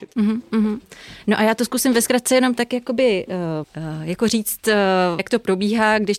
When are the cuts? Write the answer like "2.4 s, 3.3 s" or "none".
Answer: 3.6 s, 5.2 s

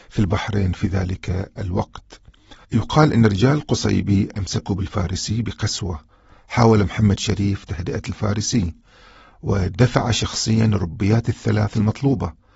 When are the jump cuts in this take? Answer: 2.6 s

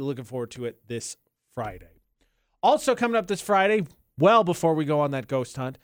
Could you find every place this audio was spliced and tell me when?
none

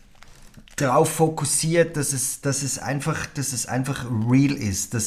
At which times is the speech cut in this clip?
none

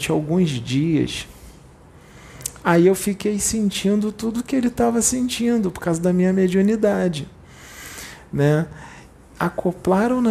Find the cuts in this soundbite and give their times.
none

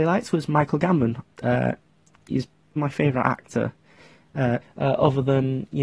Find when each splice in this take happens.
1.2 s, 2.8 s, 4.6 s

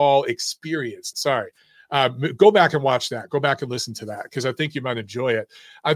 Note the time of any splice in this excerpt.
1.1 s

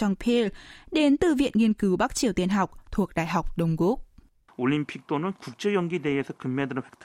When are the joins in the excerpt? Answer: 4.5 s

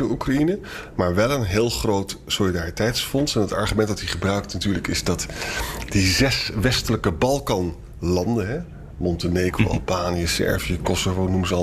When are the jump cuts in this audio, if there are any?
none

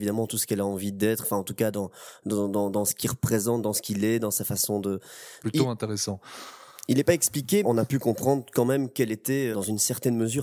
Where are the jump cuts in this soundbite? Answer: 5.4 s, 7.6 s, 9.5 s

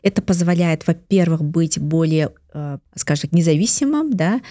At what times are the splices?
2.9 s

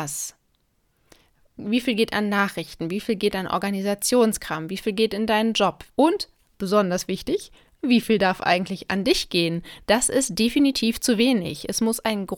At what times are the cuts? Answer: 5.9 s, 9.8 s

